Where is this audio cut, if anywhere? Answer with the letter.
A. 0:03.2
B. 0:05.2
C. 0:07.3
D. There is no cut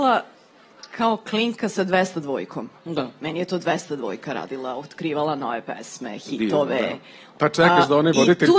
C